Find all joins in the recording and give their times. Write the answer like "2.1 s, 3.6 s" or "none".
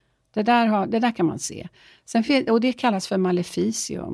none